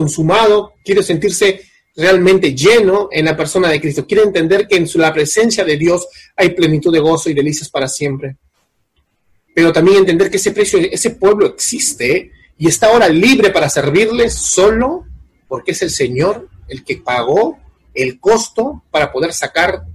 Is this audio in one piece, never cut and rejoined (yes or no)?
yes